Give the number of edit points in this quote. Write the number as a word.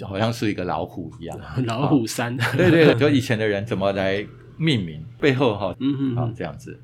two